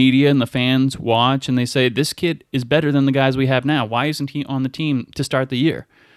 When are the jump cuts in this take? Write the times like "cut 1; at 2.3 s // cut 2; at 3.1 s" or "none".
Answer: none

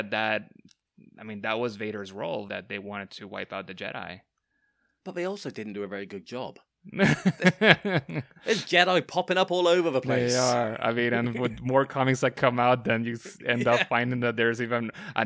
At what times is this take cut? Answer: cut 1; at 2.5 s

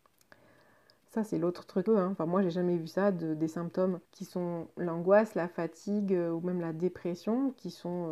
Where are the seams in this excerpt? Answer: cut 1; at 1.9 s // cut 2; at 4.0 s

